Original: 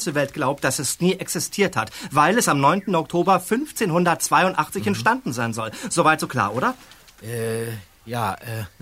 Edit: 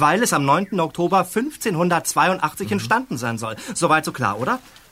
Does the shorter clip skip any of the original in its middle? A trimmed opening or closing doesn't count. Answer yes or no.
no